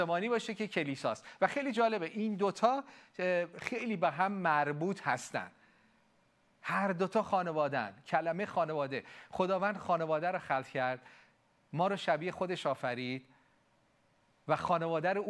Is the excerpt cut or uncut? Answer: uncut